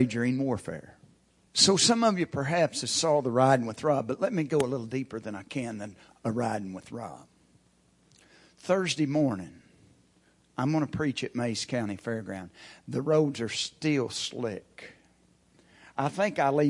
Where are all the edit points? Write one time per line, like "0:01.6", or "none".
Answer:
0:01.5